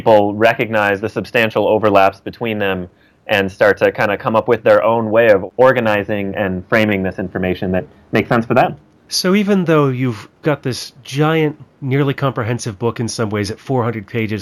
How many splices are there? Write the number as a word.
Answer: zero